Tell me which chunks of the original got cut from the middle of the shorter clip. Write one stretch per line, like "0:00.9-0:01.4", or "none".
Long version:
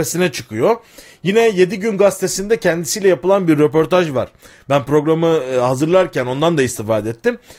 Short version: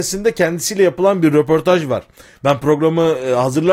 none